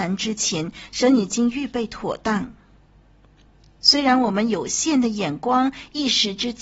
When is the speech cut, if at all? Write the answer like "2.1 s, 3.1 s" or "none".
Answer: 3.7 s